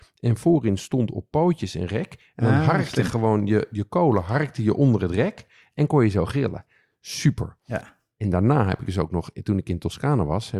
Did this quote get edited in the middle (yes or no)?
no